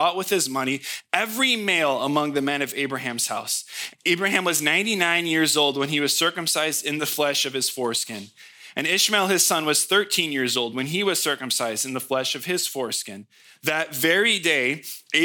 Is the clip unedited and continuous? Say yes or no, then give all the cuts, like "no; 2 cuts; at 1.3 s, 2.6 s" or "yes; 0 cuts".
no; 1 cut; at 3.9 s